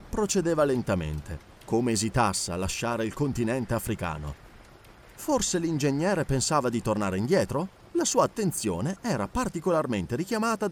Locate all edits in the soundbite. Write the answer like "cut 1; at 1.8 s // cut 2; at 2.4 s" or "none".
cut 1; at 7.8 s

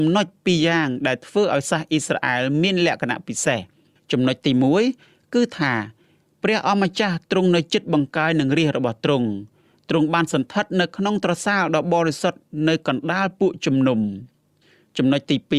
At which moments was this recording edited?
none

